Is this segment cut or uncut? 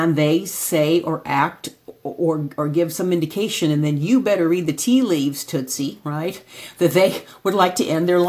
uncut